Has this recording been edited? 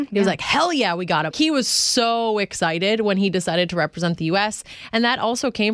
yes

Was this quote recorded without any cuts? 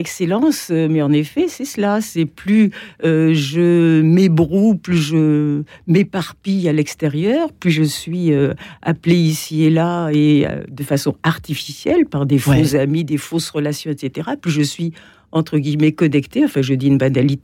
yes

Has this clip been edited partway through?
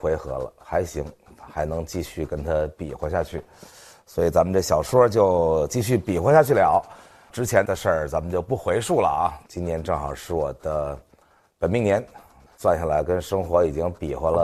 yes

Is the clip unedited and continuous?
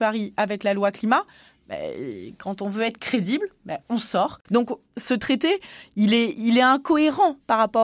no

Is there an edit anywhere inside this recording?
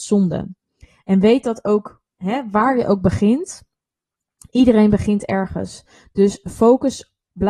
no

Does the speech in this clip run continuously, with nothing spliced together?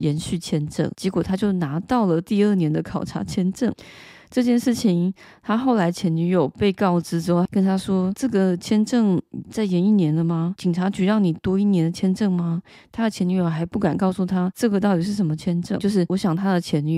no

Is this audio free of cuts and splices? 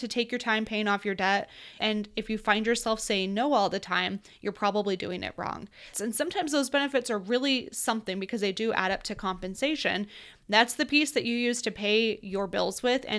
no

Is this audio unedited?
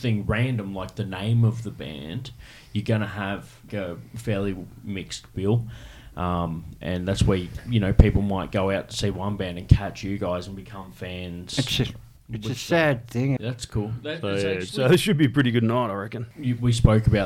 no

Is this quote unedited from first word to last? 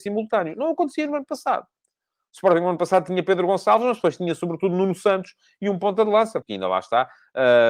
no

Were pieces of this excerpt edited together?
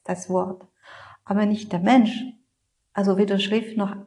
no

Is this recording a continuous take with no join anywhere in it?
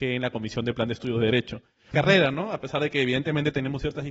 no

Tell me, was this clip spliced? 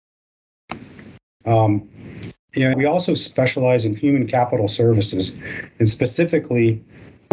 yes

